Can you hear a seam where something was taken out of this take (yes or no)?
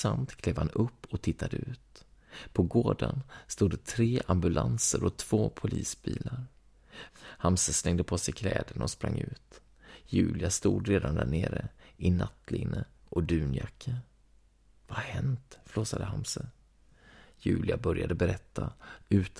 yes